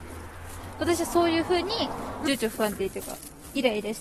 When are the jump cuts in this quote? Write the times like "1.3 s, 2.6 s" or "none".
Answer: 2.3 s

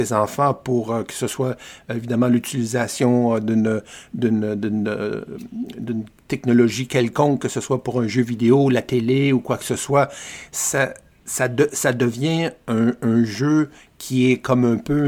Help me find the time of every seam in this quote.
none

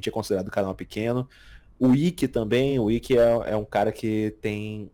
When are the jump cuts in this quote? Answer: none

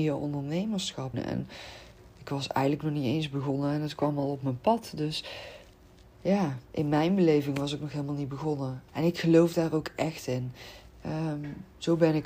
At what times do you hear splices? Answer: 1.1 s, 8.9 s, 11.0 s

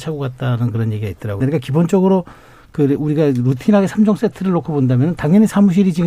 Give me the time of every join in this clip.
1.4 s

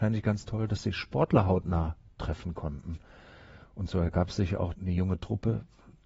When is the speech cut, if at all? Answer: 4.7 s

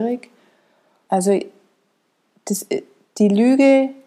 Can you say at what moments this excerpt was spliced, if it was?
1.1 s

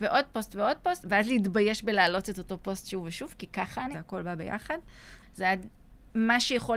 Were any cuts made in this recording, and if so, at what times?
1.0 s, 3.9 s, 5.2 s

